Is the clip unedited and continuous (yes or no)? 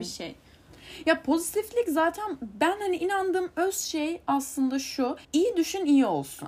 no